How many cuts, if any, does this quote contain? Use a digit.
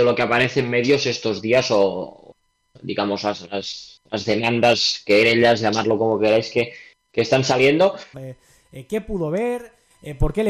1